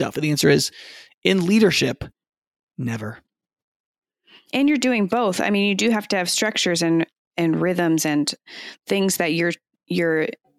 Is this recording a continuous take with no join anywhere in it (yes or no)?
yes